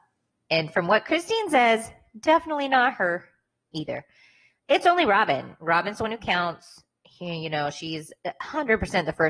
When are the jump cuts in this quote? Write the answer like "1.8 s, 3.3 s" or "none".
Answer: none